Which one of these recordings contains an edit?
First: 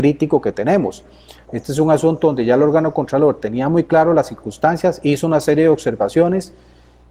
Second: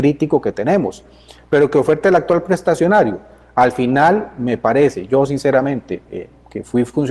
first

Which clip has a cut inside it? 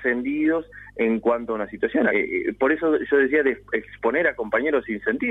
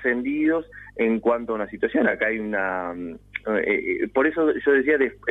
first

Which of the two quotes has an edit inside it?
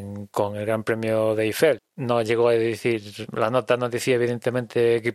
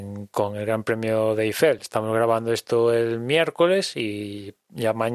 first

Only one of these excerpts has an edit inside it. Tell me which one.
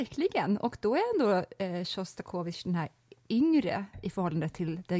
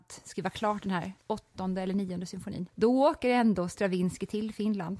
second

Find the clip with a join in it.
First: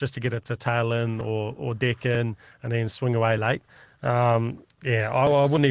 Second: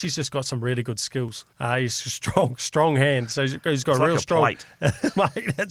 second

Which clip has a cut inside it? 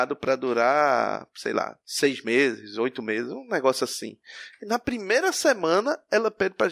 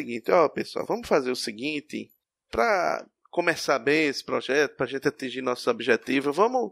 first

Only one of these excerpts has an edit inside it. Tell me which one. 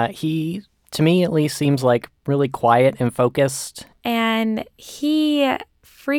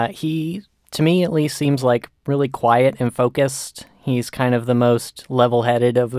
first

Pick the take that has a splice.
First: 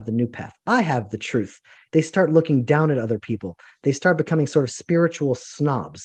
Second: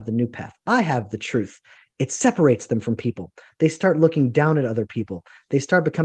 first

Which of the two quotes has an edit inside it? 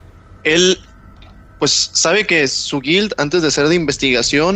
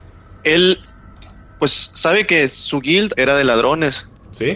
second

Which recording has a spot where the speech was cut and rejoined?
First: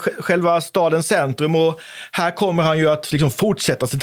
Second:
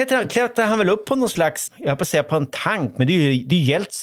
second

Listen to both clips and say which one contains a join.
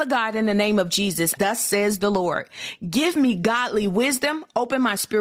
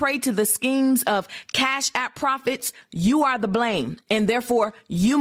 first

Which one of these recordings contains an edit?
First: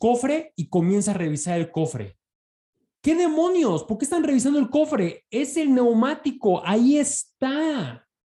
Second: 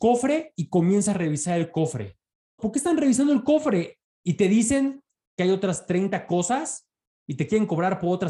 second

